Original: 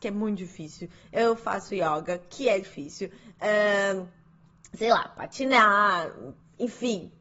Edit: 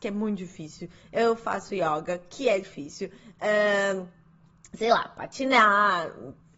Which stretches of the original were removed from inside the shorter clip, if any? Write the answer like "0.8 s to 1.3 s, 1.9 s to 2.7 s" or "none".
none